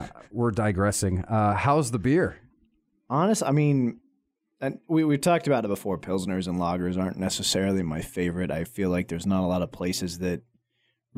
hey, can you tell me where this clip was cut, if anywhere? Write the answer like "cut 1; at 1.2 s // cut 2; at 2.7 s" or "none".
none